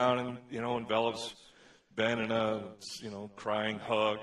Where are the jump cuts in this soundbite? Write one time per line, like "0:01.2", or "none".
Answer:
none